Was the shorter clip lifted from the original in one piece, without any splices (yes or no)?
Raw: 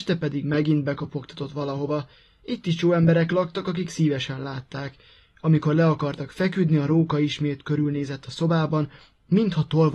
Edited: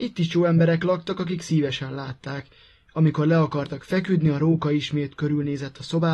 yes